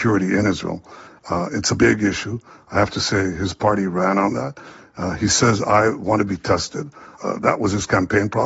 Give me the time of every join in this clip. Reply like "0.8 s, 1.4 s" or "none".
1.8 s, 7.2 s